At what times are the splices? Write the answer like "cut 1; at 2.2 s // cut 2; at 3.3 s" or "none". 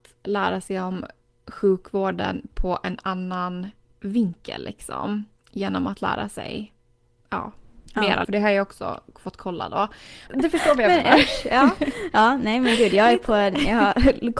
cut 1; at 8.2 s // cut 2; at 10.3 s